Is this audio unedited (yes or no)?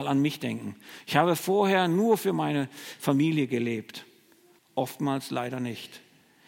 no